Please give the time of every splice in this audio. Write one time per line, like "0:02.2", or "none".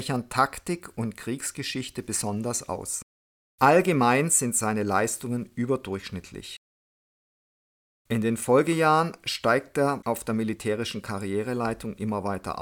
none